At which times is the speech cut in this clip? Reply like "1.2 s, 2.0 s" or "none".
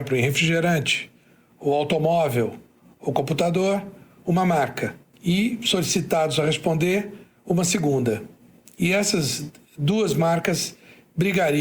none